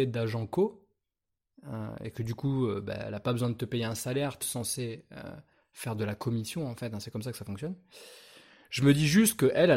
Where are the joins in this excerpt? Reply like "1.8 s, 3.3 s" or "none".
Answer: 4.4 s